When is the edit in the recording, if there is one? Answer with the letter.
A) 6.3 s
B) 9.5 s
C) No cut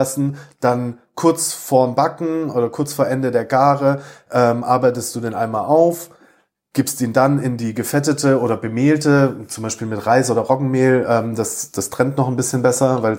C